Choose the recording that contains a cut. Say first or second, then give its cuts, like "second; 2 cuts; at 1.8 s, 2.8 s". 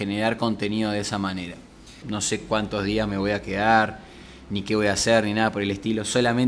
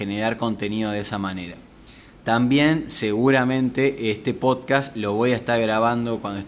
first; 1 cut; at 2.0 s